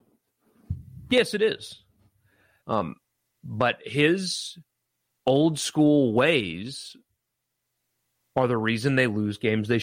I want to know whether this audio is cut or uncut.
cut